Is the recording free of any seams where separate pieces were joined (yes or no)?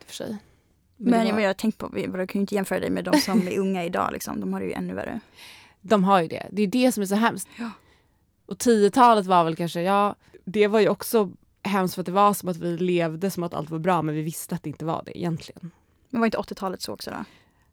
no